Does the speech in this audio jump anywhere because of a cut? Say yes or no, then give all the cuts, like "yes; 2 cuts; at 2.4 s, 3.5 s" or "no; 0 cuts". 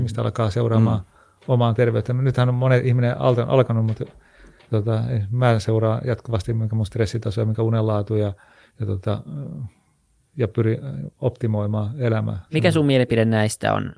yes; 1 cut; at 12.5 s